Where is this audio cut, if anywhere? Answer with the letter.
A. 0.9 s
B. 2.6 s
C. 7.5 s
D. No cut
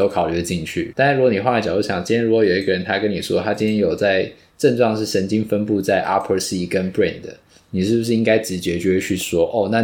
A